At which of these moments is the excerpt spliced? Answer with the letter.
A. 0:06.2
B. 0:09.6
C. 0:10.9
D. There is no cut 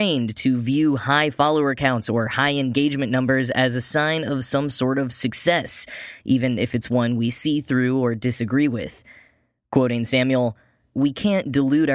C